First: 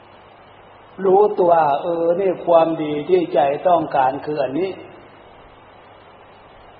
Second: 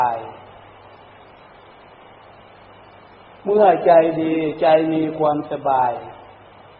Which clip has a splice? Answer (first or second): first